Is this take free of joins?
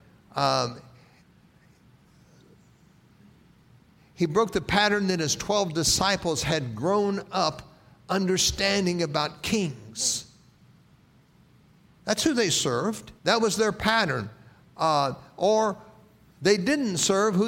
no; 2 cuts; at 11.9 s, 13.2 s

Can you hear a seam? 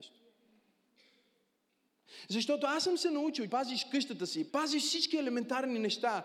yes; 2 cuts; at 3.5 s, 4.5 s

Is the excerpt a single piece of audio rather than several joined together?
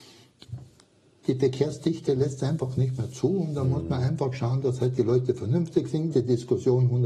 no; 1 cut; at 6.1 s

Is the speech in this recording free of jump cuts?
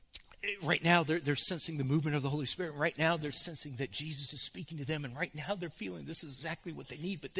yes; 0 cuts

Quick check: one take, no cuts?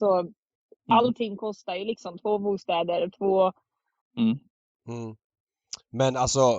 no; 1 cut; at 4.0 s

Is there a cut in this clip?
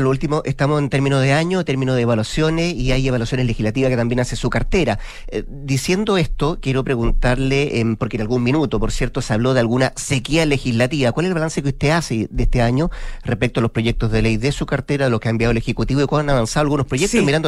no; 0 cuts

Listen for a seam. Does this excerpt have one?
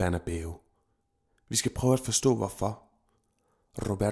no; 0 cuts

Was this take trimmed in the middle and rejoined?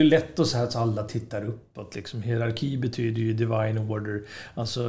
no; 0 cuts

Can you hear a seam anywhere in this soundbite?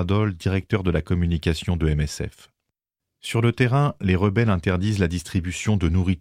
no; 0 cuts

